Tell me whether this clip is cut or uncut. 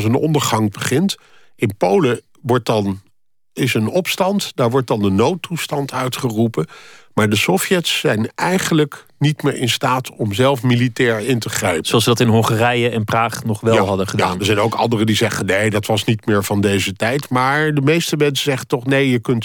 uncut